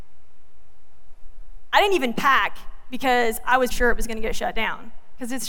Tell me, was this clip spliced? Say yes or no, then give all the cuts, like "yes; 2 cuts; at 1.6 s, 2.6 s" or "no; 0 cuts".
yes; 1 cut; at 3.7 s